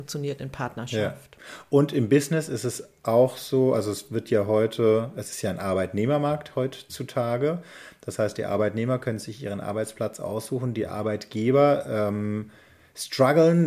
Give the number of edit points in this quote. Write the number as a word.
zero